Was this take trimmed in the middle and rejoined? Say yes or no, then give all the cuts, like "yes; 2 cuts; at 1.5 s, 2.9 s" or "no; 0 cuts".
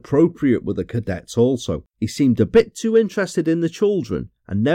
yes; 1 cut; at 1.9 s